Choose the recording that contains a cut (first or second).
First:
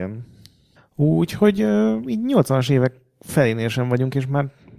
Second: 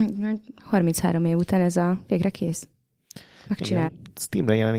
second